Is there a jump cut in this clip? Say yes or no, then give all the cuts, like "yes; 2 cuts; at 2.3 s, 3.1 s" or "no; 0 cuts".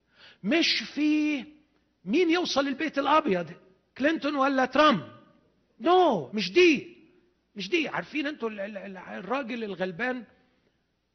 yes; 1 cut; at 6.3 s